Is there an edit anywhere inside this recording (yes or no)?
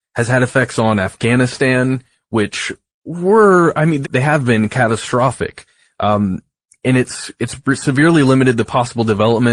yes